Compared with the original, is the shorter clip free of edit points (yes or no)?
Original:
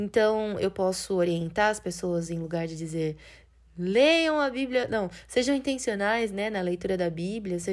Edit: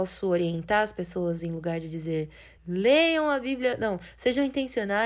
no